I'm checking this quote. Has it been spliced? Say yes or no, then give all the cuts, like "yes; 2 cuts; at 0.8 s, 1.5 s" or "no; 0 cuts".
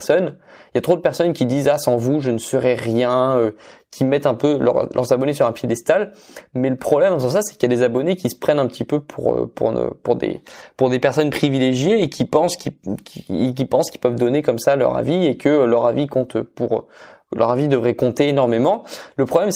no; 0 cuts